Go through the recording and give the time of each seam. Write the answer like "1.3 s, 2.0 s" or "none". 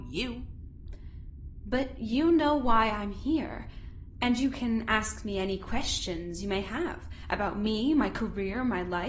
none